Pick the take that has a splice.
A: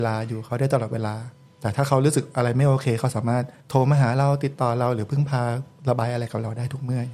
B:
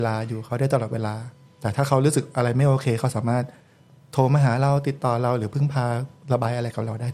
A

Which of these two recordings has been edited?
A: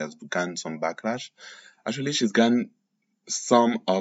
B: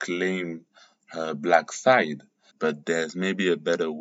B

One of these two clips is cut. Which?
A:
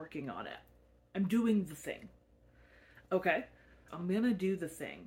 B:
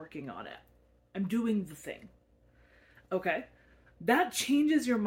A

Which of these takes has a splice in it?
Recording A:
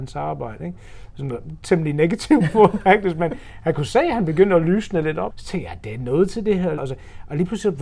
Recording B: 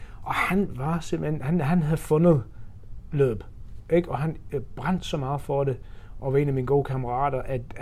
A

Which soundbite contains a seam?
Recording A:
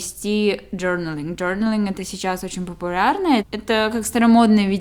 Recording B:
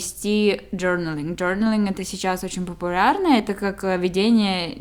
A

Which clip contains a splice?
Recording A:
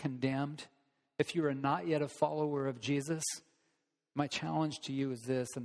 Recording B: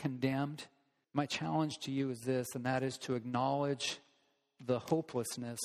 B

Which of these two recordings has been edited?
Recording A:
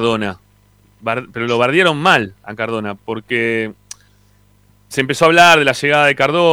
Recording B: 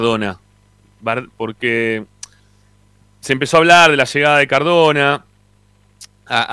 B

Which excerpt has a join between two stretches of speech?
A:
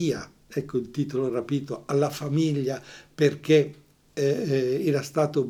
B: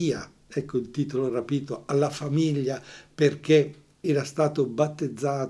B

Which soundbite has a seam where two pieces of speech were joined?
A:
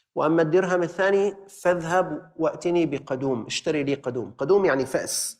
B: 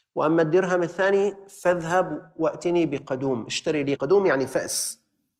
B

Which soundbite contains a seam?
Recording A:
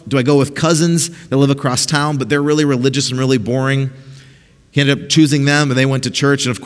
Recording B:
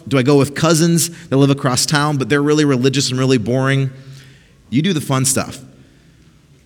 B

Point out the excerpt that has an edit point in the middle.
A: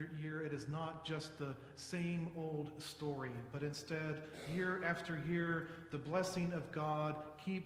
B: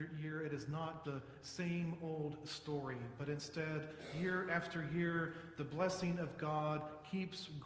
B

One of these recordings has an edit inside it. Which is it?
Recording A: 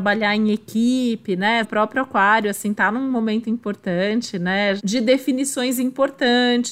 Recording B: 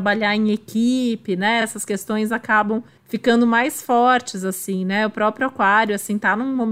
A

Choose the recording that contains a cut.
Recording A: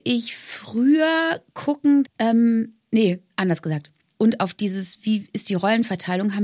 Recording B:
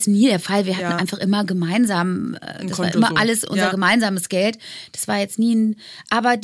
A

